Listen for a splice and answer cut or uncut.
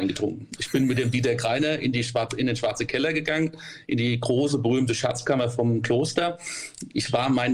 uncut